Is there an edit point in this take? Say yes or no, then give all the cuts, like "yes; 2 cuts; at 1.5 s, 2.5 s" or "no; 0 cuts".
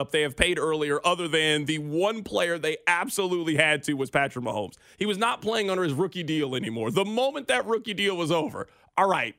no; 0 cuts